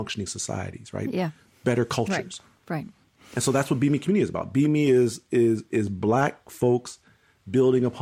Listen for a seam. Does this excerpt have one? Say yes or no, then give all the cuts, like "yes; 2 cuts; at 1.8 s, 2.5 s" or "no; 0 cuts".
no; 0 cuts